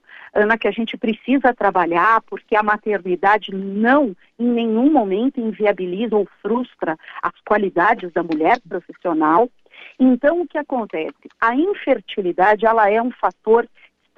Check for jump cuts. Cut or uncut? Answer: uncut